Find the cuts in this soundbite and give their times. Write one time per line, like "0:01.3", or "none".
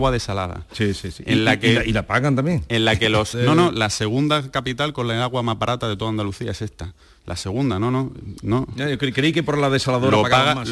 0:03.3